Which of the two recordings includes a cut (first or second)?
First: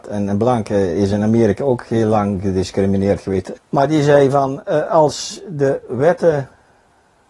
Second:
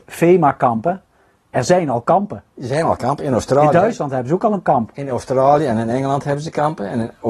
first